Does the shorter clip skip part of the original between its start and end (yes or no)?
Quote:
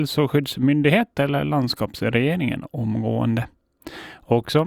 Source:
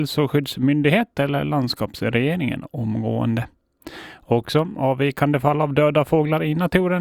no